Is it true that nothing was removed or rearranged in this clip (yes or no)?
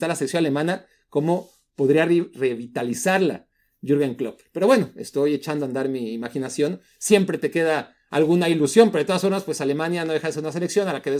yes